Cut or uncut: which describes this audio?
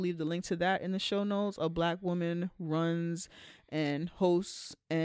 uncut